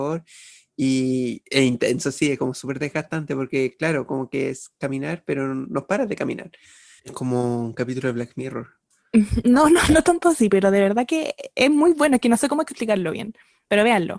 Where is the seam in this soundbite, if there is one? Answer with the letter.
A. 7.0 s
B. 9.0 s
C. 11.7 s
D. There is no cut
A